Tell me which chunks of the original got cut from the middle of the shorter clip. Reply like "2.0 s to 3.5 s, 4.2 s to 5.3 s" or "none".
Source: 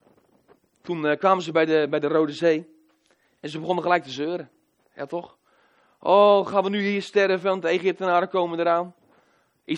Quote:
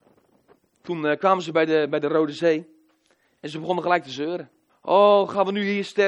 4.7 s to 5.9 s